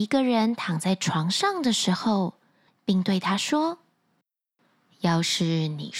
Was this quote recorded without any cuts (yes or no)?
no